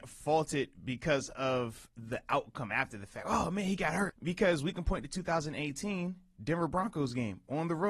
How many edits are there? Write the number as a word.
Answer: one